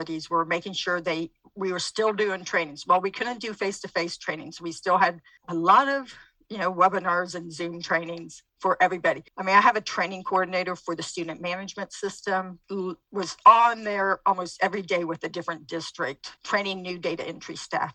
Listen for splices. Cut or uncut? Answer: uncut